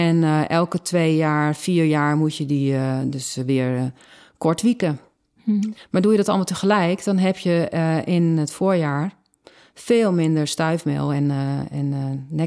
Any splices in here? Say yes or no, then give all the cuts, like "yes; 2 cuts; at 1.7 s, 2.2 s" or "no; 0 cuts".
no; 0 cuts